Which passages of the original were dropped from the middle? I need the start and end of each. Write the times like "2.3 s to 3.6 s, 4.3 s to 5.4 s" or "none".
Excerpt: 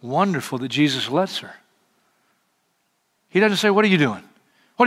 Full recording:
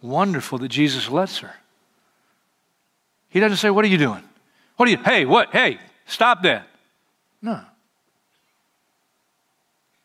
none

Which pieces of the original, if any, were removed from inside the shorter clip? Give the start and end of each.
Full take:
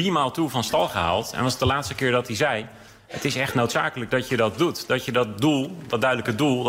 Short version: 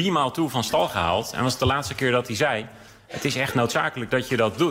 none

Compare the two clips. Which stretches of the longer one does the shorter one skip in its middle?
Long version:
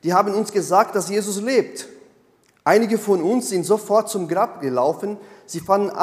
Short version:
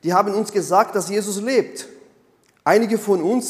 none

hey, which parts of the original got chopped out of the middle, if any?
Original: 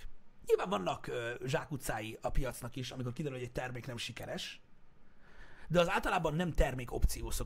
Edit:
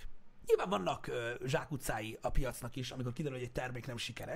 none

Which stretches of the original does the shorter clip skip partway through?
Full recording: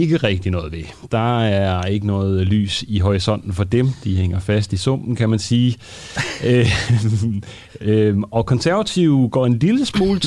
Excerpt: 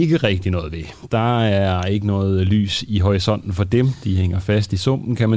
none

